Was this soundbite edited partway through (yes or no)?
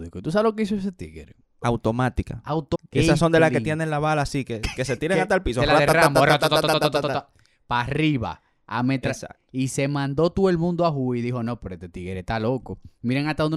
yes